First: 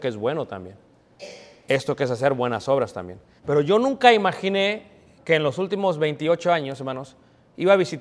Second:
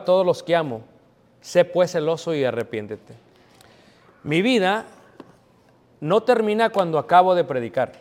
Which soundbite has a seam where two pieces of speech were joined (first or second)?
first